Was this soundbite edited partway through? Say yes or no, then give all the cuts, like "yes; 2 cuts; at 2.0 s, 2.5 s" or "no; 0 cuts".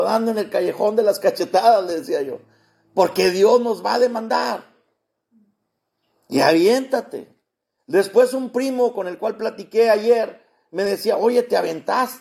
no; 0 cuts